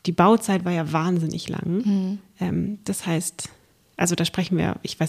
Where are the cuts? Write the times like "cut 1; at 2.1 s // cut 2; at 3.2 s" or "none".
none